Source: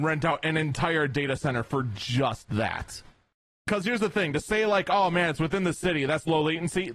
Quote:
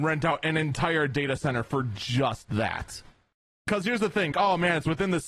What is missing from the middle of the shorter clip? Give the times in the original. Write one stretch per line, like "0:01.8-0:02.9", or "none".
0:04.3-0:04.8

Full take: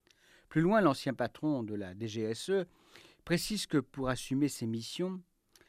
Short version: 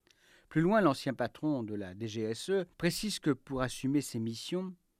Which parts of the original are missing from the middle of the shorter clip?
0:02.7-0:03.2

